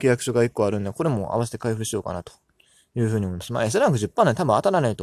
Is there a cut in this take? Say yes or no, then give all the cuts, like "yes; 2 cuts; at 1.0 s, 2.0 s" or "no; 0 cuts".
no; 0 cuts